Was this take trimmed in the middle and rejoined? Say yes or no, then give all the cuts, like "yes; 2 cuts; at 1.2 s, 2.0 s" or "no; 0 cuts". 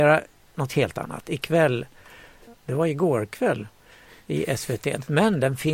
yes; 1 cut; at 2.5 s